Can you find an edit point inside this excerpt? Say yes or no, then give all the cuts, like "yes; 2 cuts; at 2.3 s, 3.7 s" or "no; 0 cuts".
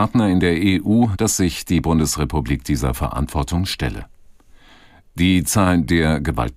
yes; 1 cut; at 1.1 s